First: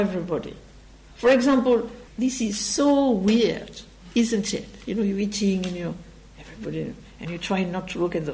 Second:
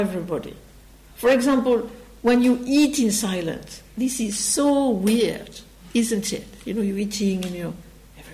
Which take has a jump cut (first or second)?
first